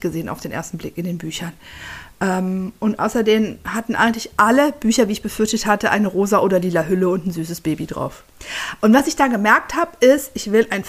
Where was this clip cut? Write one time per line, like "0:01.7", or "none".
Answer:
none